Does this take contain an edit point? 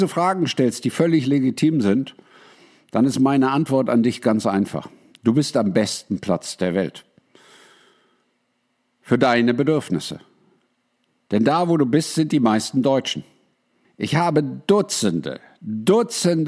yes; 1 cut; at 13.8 s

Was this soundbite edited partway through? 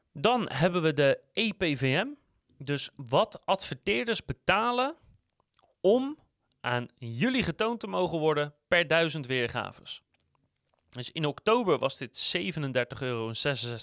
no; 0 cuts

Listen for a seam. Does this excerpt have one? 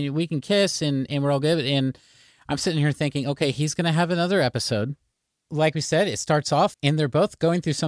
yes; 2 cuts; at 5.3 s, 6.7 s

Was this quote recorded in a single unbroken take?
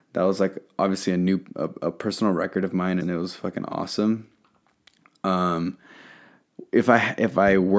no; 1 cut; at 3.0 s

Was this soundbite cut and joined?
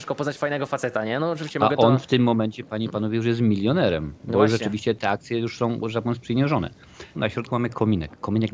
yes; 2 cuts; at 5.0 s, 7.1 s

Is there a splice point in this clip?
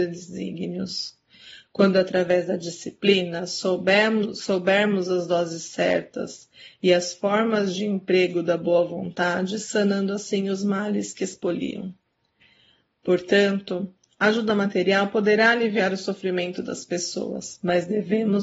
no; 0 cuts

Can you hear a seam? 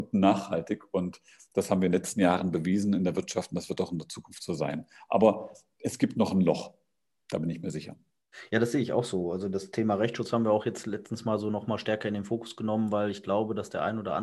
no; 0 cuts

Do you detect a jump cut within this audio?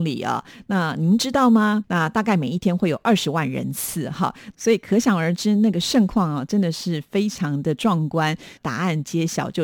yes; 2 cuts; at 1.8 s, 8.6 s

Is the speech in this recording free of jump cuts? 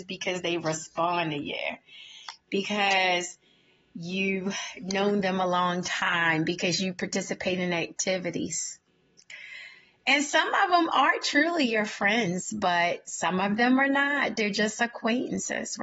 yes; 0 cuts

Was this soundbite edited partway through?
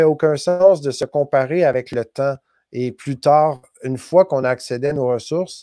no; 0 cuts

